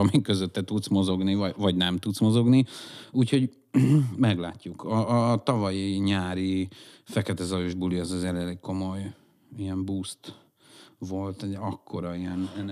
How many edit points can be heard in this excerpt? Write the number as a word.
zero